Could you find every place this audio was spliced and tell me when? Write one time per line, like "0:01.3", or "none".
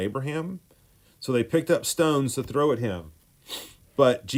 0:01.0